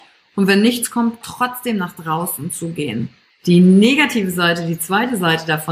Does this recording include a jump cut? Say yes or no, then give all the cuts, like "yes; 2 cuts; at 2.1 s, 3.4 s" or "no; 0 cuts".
yes; 2 cuts; at 1.2 s, 3.3 s